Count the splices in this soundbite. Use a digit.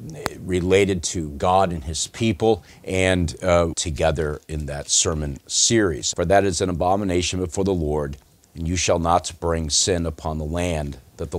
3